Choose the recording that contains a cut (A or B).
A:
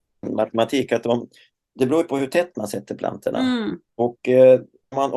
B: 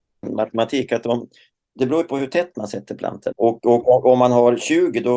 B